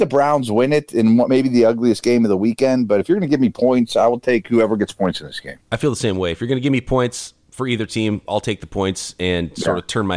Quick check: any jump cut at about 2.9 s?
no; 0 cuts

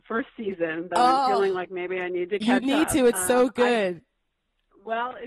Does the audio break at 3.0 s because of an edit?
no; 0 cuts

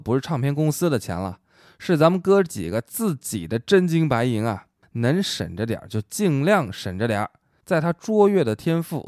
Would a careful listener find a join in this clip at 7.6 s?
yes; 1 cut; at 7.6 s

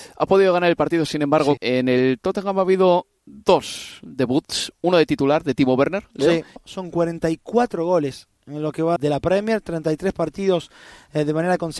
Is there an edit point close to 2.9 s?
no; 3 cuts; at 1.6 s, 6.6 s, 9.0 s

